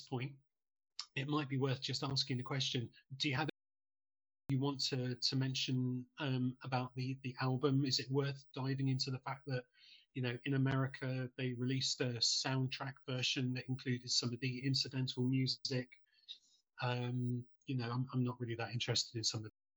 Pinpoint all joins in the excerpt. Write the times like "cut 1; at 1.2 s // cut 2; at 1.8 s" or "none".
none